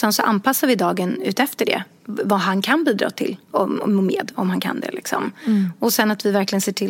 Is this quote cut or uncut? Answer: cut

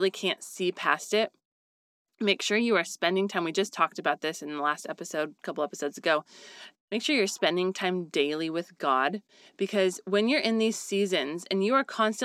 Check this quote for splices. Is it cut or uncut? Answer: uncut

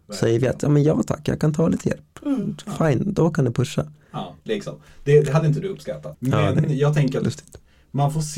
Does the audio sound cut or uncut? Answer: cut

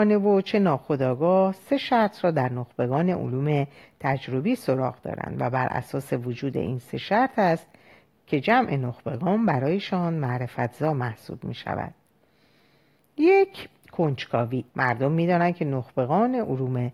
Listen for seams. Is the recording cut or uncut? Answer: cut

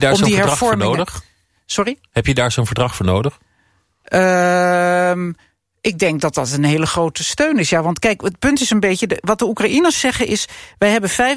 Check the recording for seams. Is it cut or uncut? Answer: uncut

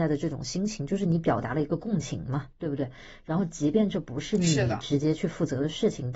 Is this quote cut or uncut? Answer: uncut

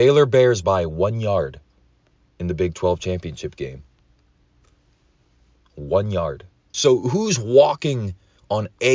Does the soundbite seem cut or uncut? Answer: cut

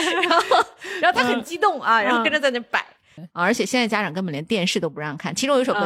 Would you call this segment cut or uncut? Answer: cut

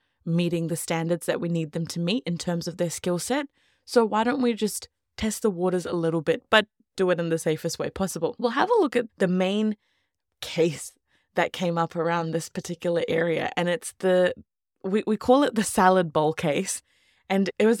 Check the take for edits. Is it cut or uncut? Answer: uncut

